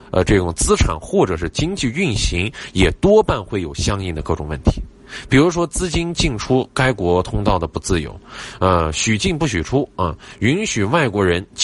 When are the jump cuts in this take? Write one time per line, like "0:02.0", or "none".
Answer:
none